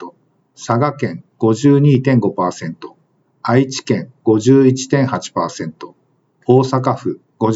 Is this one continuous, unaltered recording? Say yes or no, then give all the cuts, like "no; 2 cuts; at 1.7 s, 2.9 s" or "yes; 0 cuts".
yes; 0 cuts